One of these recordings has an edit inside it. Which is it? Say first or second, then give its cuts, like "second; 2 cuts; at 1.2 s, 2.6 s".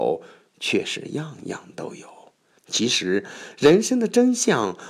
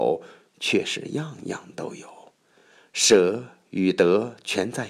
first; 1 cut; at 2.6 s